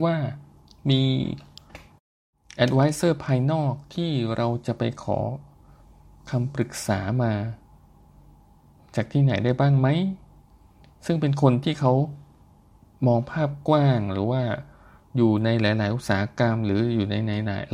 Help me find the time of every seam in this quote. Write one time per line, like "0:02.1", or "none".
none